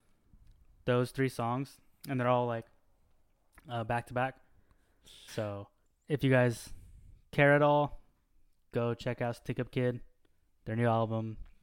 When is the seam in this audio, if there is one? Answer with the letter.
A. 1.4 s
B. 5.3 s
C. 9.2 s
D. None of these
B